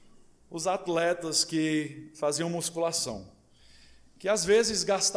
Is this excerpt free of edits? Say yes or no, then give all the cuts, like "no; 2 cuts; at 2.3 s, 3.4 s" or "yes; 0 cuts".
yes; 0 cuts